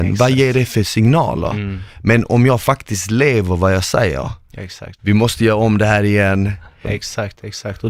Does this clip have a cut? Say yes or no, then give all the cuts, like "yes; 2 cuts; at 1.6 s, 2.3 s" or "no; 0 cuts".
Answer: yes; 2 cuts; at 5.0 s, 6.8 s